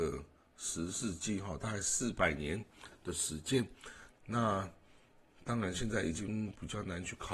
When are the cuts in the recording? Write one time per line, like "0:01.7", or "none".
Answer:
0:04.1

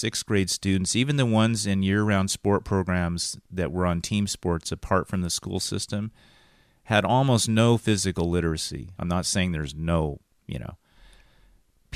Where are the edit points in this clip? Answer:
0:09.0

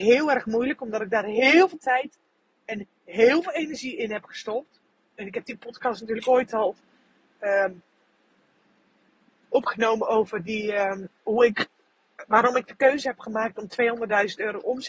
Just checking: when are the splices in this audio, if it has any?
0:09.4

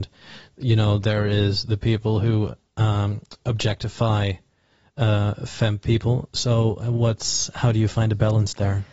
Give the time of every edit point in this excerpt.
none

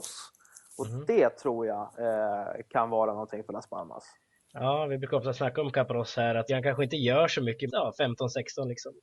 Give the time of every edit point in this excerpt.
0:06.5
0:07.7

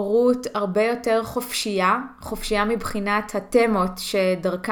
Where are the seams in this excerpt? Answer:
none

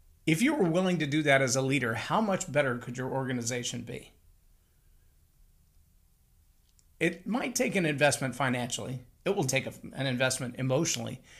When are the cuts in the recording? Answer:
0:09.5

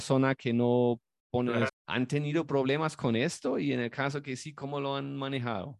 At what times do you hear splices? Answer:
0:01.7

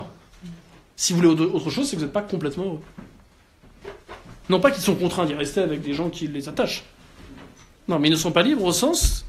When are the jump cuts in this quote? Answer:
0:04.4

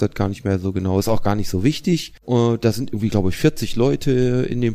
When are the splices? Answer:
0:02.2

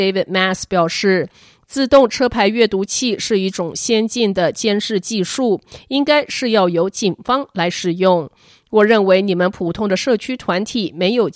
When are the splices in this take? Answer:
none

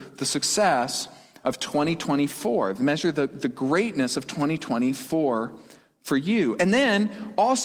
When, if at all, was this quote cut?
none

